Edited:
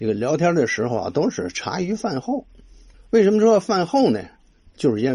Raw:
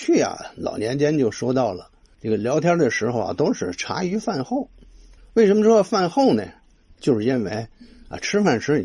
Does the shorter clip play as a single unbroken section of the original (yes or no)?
yes